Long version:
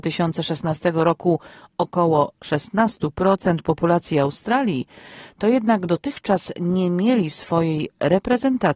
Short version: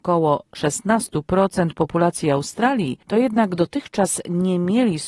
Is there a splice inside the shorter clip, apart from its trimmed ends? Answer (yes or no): yes